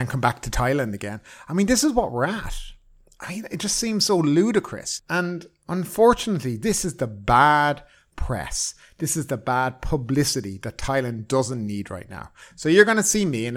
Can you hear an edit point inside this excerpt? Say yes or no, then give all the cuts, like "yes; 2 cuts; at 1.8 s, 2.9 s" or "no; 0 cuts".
no; 0 cuts